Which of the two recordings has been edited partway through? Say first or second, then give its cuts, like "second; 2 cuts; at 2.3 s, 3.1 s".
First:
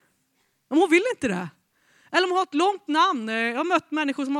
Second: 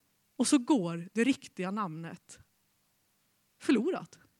second; 1 cut; at 3.4 s